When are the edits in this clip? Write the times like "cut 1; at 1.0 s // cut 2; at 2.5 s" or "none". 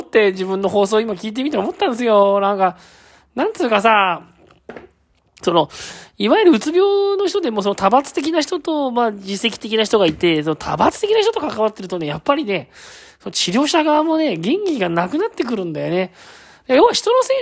none